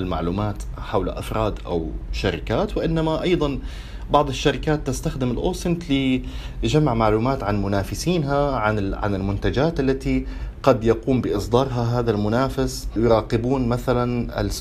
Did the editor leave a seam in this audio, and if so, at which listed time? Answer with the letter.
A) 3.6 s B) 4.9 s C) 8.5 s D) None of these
D